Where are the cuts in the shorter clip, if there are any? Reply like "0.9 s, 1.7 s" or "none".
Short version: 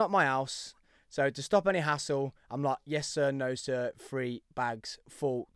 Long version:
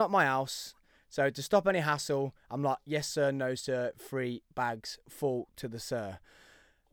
none